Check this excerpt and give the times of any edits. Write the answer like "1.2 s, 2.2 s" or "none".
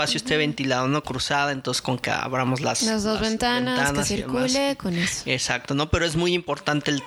1.0 s